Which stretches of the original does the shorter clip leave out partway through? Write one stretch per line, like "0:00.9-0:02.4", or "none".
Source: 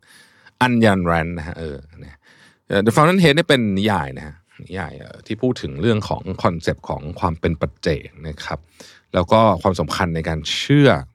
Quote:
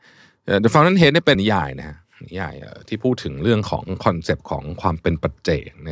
0:03.6-0:03.7

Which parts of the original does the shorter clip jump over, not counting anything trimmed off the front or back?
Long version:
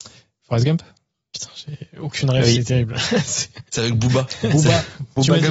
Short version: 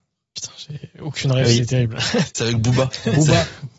0:03.2-0:03.6

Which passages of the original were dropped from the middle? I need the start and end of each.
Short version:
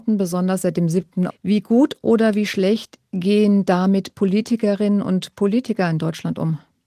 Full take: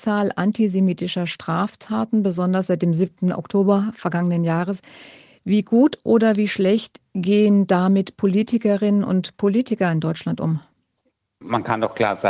0:03.3-0:05.3

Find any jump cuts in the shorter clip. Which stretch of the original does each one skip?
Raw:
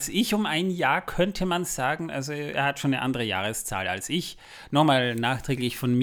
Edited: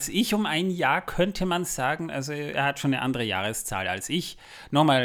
none

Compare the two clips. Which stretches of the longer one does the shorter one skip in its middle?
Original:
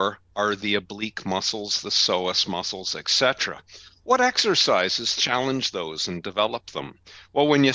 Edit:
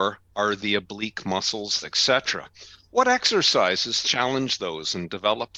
0:01.8-0:02.9

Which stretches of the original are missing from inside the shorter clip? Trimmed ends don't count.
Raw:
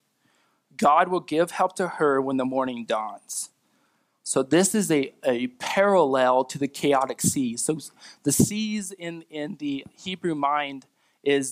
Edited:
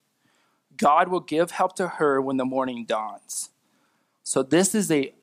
none

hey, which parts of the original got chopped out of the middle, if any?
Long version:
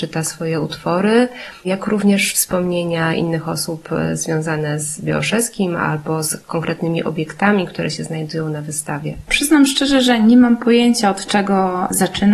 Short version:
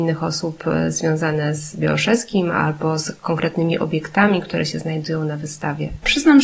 none

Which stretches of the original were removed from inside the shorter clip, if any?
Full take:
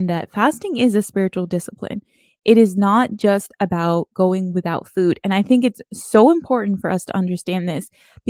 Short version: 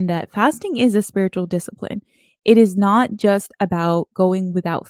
none

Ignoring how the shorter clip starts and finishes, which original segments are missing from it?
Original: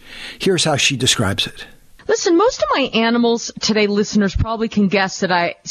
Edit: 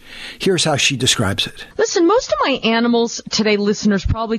0:01.7-0:02.0

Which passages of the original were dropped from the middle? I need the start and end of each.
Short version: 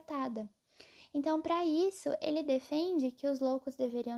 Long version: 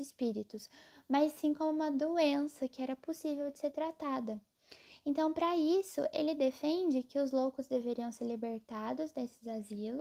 none

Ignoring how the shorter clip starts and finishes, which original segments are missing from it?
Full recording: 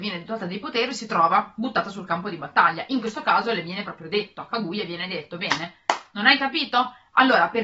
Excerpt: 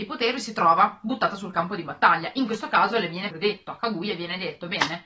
0:03.8-0:04.0

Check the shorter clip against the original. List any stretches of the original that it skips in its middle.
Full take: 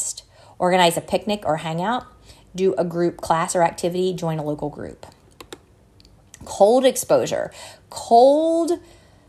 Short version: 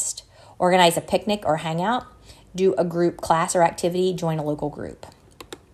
none

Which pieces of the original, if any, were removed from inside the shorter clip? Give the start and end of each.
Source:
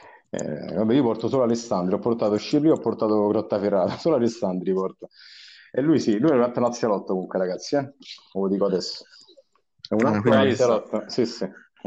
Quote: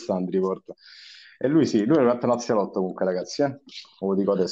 none

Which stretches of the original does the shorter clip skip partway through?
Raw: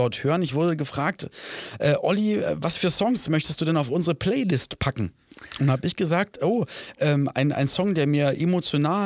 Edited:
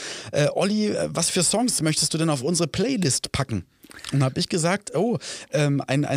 none

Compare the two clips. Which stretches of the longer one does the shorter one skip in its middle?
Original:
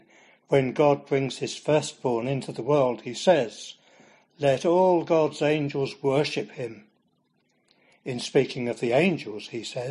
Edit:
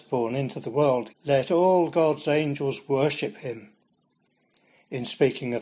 0:03.0-0:04.2

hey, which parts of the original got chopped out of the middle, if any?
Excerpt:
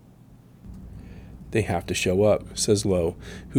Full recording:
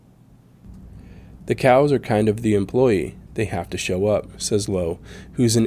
0:01.4-0:03.3

